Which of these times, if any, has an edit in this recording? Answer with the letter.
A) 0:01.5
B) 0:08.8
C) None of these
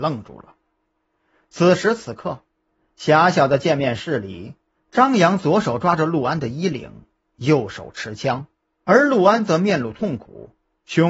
B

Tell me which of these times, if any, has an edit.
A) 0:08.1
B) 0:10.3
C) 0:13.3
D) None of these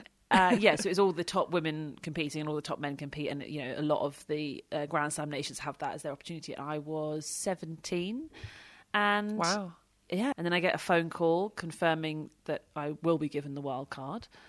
B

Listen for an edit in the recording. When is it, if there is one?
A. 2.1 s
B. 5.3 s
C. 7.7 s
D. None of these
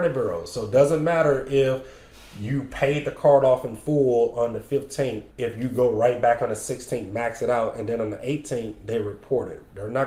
B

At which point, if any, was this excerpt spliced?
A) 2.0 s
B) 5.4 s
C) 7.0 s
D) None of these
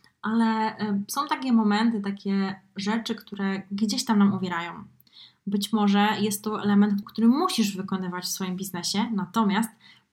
C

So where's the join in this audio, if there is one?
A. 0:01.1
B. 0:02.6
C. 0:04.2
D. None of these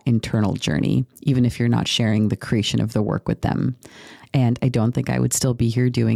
C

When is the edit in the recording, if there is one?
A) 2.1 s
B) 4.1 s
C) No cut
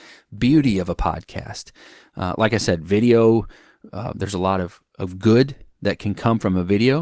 B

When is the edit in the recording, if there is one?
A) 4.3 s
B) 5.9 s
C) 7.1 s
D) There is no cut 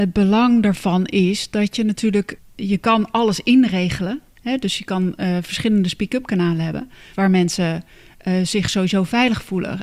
C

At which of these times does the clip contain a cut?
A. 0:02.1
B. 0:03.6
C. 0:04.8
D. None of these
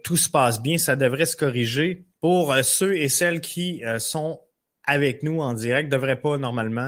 A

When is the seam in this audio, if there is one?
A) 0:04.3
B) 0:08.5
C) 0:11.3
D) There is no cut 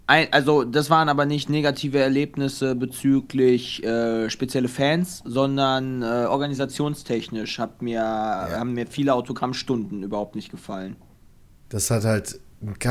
D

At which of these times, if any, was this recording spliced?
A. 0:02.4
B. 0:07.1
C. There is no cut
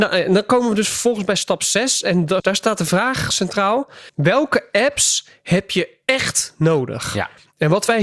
A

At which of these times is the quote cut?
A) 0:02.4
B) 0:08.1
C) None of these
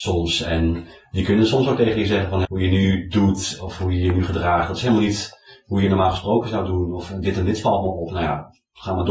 A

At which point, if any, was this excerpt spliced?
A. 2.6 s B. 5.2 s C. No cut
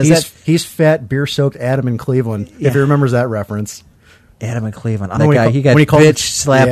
B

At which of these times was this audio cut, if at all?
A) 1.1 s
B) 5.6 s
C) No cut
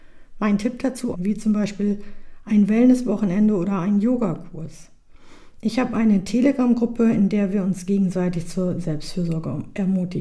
A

